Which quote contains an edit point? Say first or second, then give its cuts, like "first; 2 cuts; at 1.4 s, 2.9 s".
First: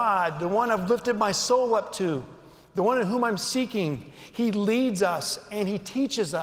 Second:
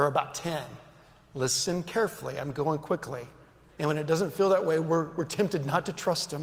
second; 1 cut; at 3.7 s